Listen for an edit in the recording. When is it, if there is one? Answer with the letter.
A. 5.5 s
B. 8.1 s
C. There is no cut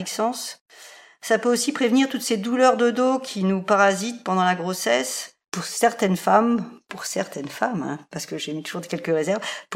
A